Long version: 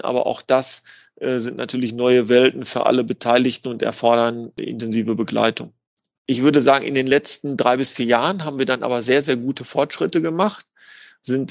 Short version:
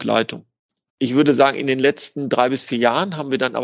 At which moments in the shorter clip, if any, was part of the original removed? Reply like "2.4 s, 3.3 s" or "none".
none